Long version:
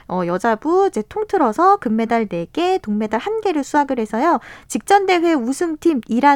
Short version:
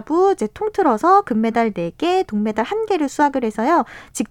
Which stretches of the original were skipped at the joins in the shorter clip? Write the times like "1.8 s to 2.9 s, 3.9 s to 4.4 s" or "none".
none